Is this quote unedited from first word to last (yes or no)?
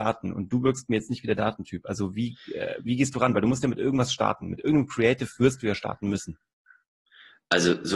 yes